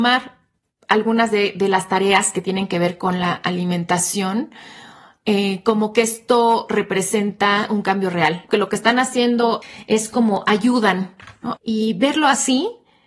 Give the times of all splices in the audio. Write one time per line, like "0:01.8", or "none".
0:08.5
0:11.6